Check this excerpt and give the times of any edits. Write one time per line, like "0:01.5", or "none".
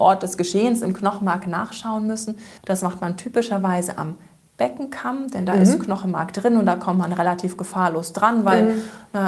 0:02.6